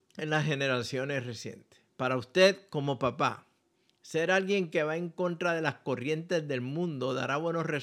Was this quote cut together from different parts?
yes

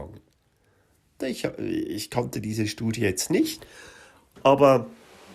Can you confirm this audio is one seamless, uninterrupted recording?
no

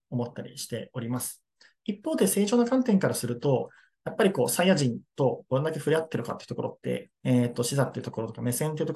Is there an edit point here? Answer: yes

